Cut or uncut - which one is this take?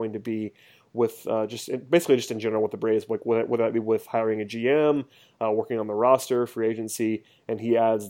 uncut